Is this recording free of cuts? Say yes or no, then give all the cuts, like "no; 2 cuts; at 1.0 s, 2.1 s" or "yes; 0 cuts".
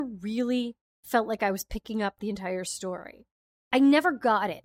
yes; 0 cuts